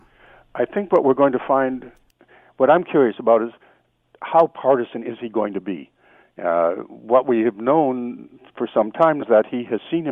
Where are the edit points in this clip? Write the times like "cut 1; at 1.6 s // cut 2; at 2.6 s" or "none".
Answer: cut 1; at 9.2 s